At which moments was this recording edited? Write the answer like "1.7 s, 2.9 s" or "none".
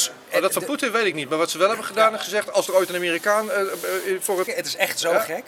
4.5 s